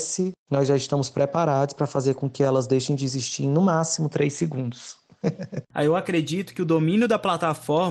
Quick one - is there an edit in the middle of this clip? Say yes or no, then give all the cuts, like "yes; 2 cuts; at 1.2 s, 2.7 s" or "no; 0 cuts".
yes; 1 cut; at 5.6 s